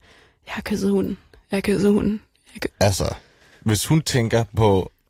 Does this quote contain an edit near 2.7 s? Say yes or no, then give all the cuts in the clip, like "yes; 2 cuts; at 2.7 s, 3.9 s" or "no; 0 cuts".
yes; 1 cut; at 2.7 s